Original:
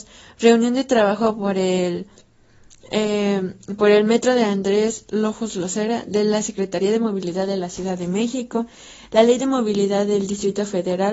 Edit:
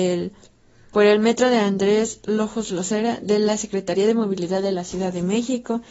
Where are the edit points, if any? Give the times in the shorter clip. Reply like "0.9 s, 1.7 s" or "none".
0.9 s